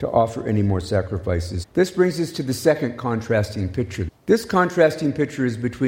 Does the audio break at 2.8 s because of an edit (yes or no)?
no